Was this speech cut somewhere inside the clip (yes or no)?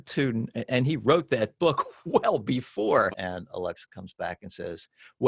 yes